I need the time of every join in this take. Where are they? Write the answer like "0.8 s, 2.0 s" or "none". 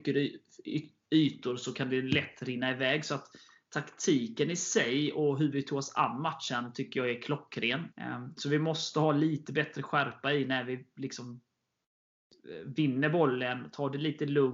7.9 s